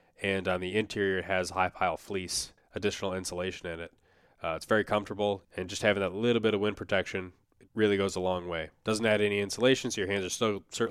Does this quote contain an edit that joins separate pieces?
yes; 2 cuts; at 2.6 s, 5.4 s

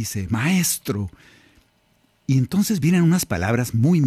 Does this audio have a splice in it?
no; 0 cuts

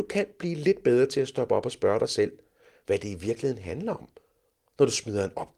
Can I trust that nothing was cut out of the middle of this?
yes; 0 cuts

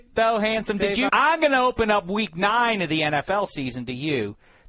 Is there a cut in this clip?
yes; 1 cut; at 1.1 s

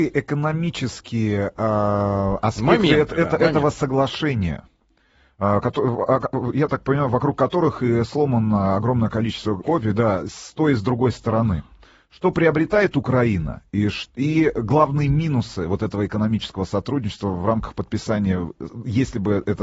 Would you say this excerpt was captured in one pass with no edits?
no; 1 cut; at 9.6 s

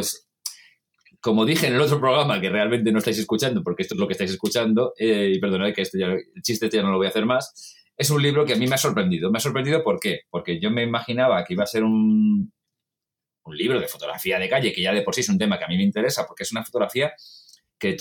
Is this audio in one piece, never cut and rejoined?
yes; 0 cuts

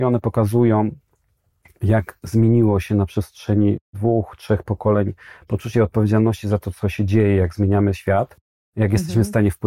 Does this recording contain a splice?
no; 0 cuts

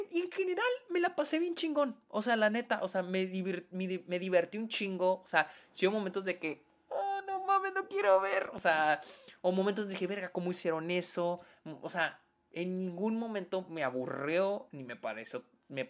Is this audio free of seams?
yes; 0 cuts

